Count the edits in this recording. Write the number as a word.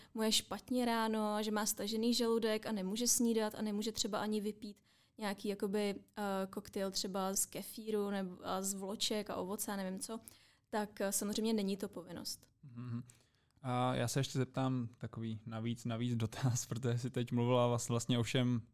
one